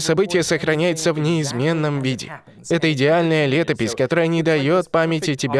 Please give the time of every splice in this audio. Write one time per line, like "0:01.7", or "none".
none